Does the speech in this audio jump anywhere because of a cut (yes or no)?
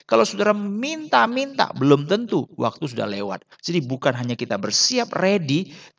yes